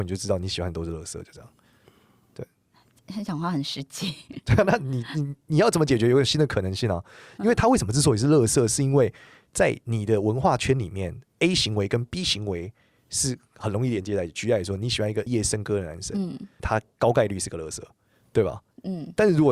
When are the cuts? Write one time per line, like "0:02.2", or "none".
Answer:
0:15.3
0:16.6